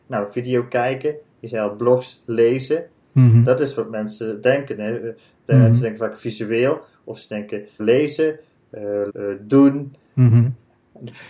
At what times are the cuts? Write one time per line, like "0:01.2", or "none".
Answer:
0:07.8
0:09.1

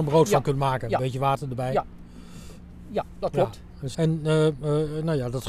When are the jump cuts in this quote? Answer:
0:03.9

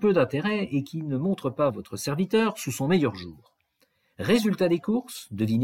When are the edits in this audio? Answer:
0:01.7

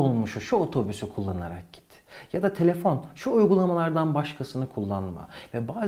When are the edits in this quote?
none

